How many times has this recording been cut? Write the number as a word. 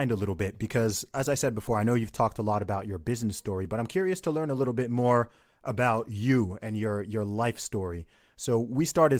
zero